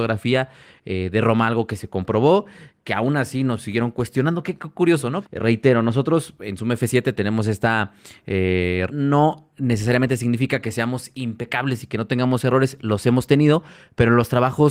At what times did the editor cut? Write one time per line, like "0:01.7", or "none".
0:05.2
0:08.9

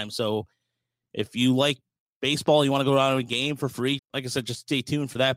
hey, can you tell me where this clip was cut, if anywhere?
0:04.0

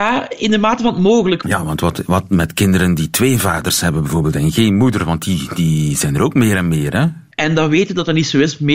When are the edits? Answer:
0:01.4
0:07.3

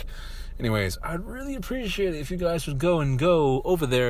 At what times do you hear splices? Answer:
none

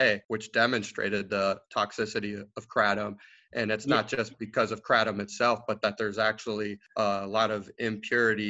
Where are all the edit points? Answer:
none

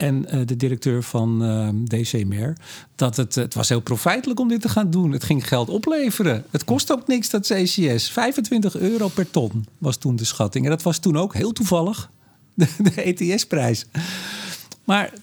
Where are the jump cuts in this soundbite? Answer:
none

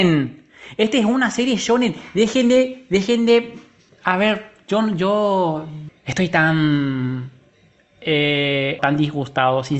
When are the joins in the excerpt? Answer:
0:05.9
0:08.8

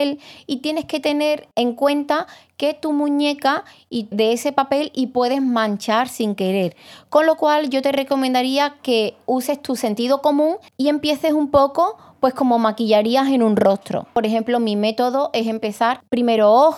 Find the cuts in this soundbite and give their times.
0:04.1

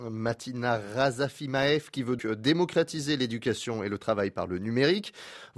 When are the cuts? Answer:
0:02.2

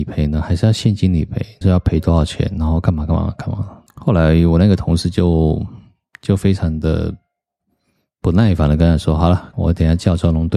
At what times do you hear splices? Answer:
0:01.6
0:03.9
0:09.5

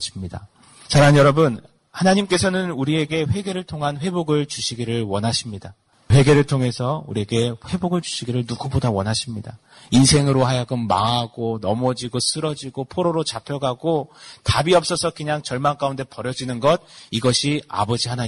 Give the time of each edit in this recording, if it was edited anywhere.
none

